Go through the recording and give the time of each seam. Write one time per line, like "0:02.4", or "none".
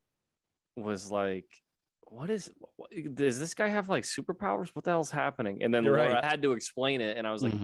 0:06.2